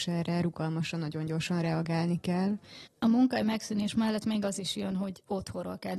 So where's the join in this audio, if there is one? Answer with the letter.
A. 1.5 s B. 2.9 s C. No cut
B